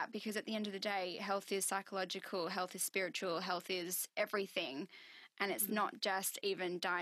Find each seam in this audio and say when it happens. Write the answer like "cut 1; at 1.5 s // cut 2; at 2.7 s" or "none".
none